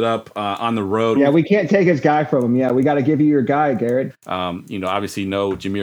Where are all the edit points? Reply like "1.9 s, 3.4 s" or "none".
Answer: 1.2 s, 4.1 s